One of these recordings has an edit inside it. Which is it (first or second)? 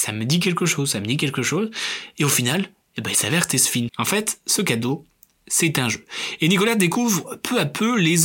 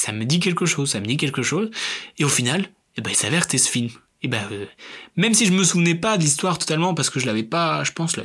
first